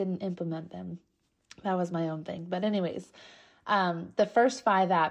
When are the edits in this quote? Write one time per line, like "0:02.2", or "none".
none